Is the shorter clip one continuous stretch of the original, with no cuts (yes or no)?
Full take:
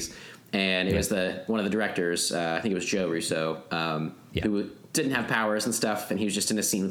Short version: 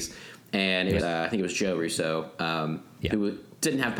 no